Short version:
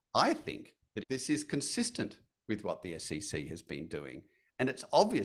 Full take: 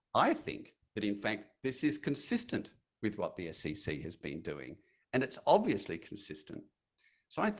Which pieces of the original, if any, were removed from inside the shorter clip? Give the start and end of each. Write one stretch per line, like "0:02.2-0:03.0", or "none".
0:01.0-0:01.5